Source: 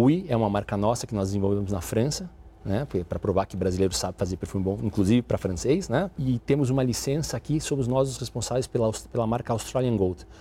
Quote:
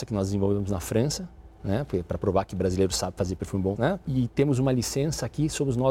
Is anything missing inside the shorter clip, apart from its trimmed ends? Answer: yes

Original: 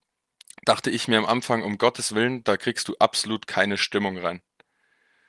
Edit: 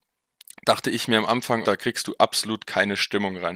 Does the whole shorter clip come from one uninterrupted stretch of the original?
no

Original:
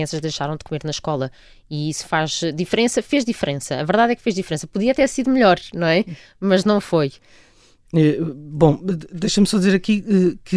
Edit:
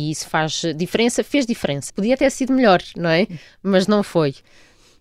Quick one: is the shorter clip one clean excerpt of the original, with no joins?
no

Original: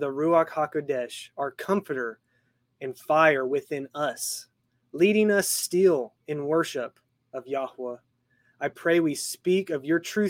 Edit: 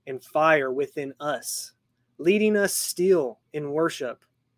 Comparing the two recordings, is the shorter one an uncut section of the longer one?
yes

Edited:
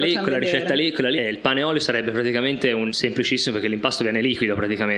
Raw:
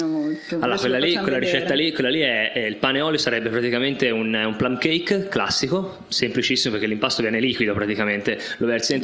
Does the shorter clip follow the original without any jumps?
no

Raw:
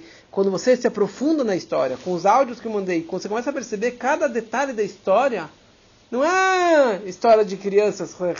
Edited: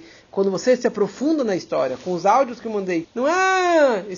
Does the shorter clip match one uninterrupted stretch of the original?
no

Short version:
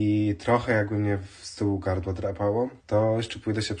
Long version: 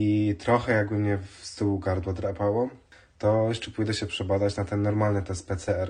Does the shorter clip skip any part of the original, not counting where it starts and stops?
yes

